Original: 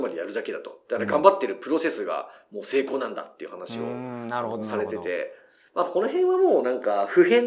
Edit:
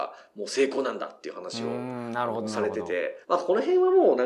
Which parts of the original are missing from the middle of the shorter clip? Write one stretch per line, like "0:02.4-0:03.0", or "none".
0:05.4-0:05.7